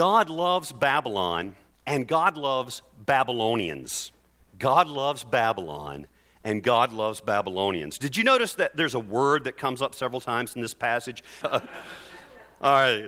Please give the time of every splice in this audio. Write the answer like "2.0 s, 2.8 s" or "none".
11.4 s